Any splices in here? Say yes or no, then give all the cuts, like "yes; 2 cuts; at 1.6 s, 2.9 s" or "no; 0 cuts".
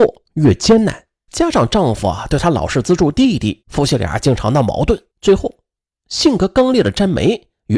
yes; 3 cuts; at 1.3 s, 3.6 s, 5.1 s